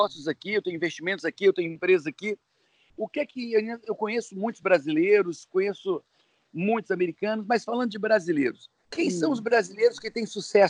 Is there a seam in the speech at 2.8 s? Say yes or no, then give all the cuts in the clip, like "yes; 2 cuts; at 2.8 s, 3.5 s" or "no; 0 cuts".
no; 1 cut; at 8.8 s